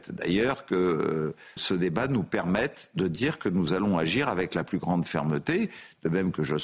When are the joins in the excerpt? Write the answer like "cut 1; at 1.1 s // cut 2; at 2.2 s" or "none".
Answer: cut 1; at 1.6 s